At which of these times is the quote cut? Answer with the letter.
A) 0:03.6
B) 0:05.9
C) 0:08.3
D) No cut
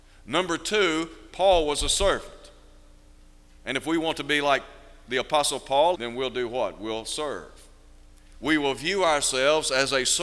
B